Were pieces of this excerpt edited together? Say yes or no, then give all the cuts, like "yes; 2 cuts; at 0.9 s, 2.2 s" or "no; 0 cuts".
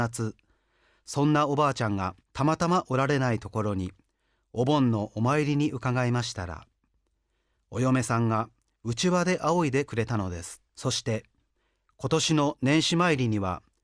yes; 2 cuts; at 2.2 s, 10.7 s